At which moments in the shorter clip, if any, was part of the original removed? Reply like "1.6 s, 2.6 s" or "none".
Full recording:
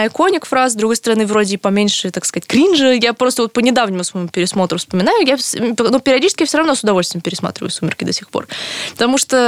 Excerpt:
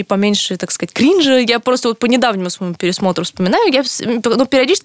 none